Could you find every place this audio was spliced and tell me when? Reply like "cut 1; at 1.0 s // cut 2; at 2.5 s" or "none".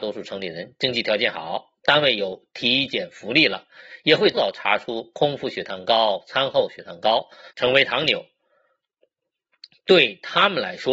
cut 1; at 4.3 s // cut 2; at 7.5 s